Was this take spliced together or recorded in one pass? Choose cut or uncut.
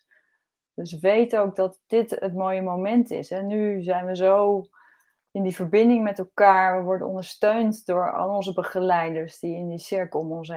uncut